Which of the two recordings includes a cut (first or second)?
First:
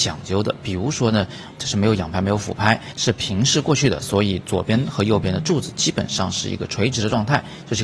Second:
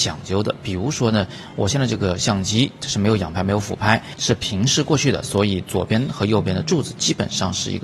first